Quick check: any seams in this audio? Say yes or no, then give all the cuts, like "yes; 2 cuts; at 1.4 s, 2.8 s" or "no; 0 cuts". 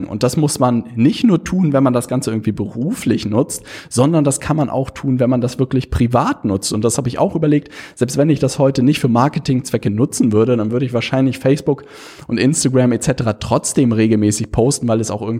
no; 0 cuts